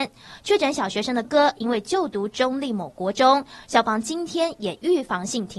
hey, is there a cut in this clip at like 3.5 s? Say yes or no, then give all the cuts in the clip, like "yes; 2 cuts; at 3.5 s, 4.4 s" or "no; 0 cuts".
no; 1 cut; at 1.2 s